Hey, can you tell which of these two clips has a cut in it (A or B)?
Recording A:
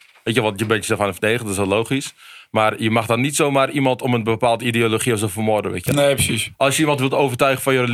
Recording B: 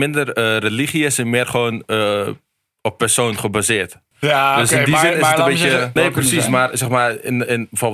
B